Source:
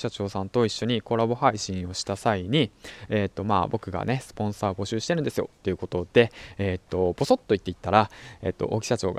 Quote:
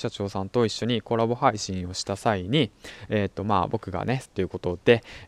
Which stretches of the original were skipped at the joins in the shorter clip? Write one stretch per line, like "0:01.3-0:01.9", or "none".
0:04.3-0:05.5